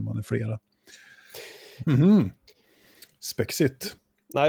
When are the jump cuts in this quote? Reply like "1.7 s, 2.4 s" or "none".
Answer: 1.9 s